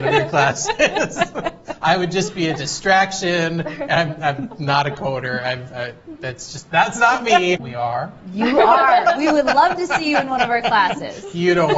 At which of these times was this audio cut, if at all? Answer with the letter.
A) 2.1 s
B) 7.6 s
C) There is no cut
B